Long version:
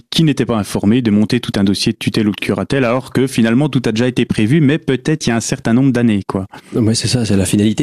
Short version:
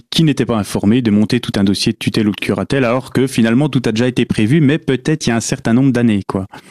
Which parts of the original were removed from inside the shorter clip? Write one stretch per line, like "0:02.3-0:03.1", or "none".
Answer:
none